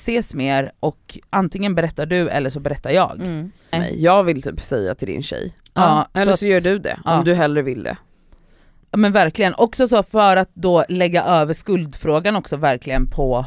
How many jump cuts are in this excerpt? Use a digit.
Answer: 1